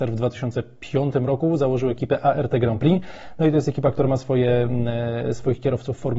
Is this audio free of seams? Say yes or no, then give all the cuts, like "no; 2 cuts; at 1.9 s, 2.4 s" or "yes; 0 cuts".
yes; 0 cuts